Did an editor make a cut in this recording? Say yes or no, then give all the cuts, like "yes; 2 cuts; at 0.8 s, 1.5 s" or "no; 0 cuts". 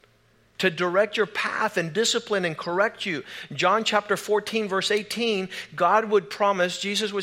no; 0 cuts